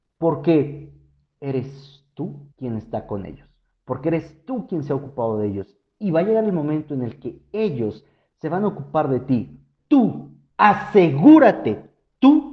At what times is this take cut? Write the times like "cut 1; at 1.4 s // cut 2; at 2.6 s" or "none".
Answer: cut 1; at 2.5 s // cut 2; at 9.8 s